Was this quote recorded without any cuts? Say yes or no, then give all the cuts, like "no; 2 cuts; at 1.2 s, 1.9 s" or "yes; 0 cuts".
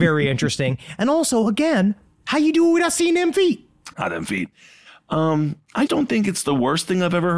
no; 2 cuts; at 3.9 s, 5.9 s